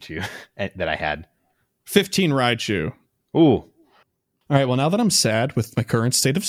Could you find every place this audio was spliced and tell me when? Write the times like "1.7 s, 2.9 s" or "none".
none